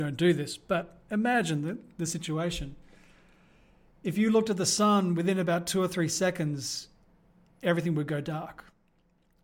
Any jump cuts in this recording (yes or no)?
no